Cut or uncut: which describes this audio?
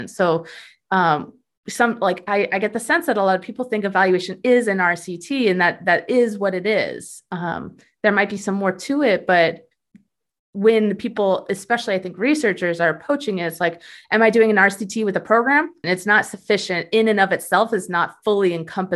cut